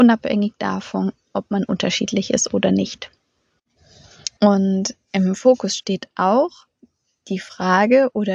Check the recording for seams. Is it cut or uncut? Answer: cut